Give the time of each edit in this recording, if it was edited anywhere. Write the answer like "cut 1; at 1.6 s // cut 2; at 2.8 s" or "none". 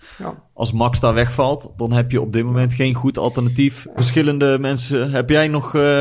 cut 1; at 4.0 s